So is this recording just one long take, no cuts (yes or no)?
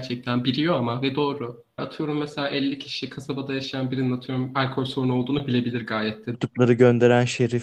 no